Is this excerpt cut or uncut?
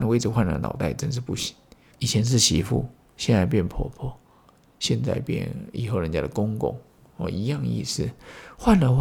cut